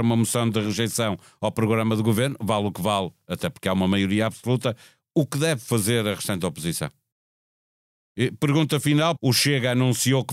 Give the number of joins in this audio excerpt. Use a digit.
2